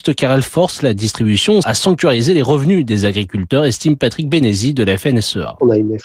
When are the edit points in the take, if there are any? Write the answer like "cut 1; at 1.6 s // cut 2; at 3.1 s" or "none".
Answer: cut 1; at 1.6 s

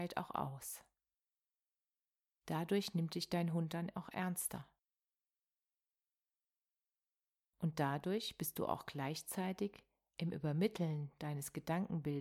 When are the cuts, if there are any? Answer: none

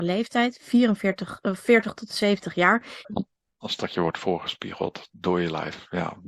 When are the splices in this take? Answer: cut 1; at 3.0 s

